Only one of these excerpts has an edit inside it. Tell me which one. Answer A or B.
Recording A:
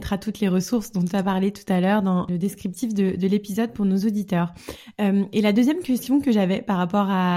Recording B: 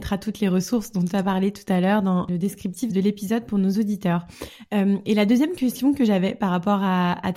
B